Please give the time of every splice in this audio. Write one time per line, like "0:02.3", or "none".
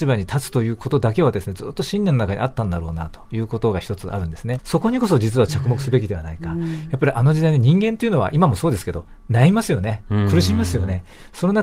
0:04.6